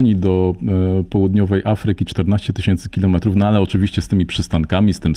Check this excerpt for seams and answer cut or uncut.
uncut